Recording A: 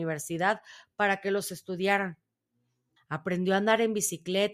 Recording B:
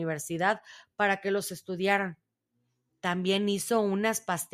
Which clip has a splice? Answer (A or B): A